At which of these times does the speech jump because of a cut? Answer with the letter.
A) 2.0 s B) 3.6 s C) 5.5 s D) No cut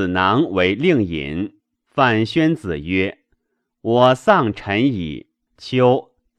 C